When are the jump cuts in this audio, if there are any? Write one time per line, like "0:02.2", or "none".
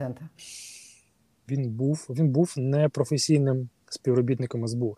0:01.4